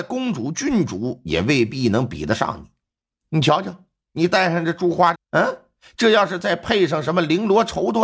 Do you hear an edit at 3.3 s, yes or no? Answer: no